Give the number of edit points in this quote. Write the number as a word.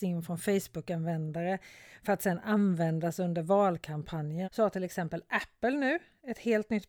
one